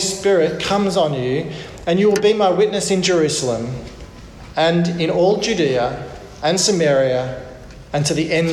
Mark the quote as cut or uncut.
uncut